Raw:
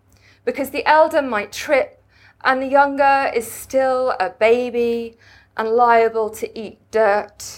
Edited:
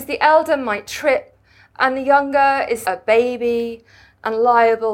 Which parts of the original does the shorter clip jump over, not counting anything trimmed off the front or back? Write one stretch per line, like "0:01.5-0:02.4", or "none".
0:03.5-0:04.2